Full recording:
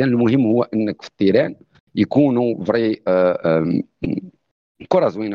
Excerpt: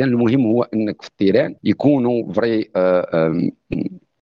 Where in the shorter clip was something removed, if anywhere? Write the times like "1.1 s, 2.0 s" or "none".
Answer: 1.6 s